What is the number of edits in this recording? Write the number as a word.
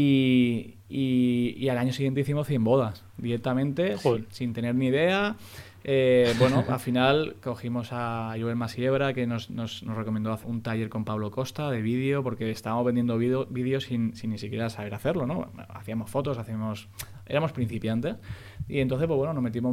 one